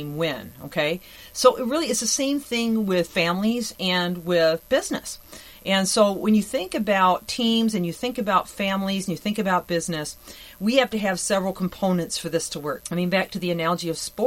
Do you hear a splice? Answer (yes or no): yes